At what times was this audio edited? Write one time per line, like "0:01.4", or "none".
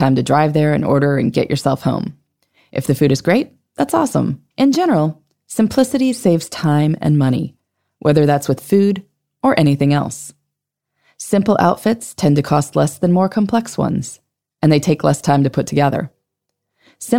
0:04.5